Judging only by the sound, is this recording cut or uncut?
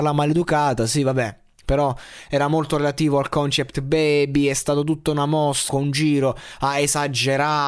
cut